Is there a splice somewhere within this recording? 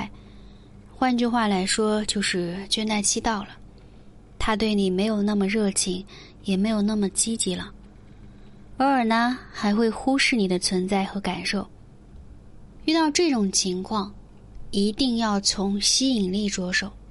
yes; 1 cut; at 12.8 s

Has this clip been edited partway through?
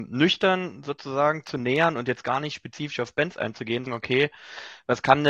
yes; 1 cut; at 3.9 s

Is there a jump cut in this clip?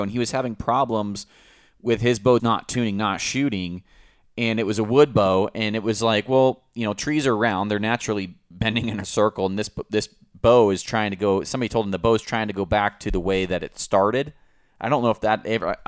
yes; 1 cut; at 2.4 s

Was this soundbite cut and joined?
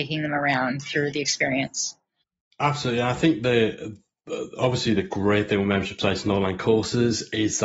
no; 0 cuts

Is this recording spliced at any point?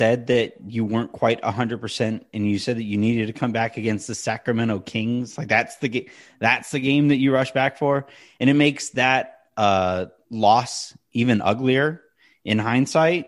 no; 0 cuts

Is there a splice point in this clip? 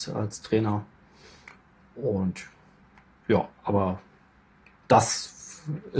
no; 0 cuts

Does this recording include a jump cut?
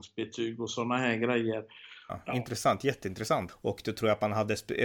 yes; 2 cuts; at 2.1 s, 3.5 s

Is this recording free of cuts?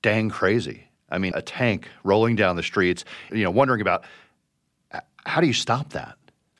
no; 2 cuts; at 1.3 s, 3.3 s

